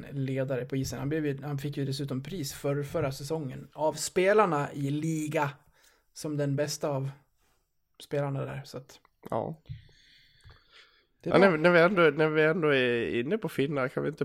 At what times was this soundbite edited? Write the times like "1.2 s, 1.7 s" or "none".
none